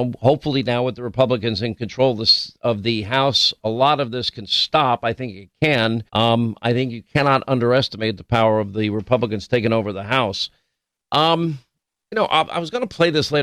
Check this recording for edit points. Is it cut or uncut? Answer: cut